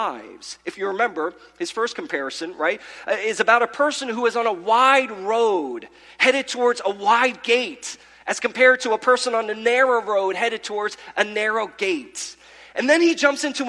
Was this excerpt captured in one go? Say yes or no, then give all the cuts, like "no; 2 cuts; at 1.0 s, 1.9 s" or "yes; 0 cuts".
yes; 0 cuts